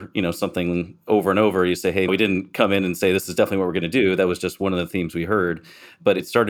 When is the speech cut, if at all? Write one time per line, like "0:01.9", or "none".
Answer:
0:02.1